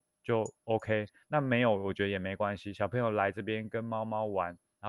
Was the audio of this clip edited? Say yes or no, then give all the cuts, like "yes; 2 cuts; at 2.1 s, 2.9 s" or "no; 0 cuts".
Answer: no; 0 cuts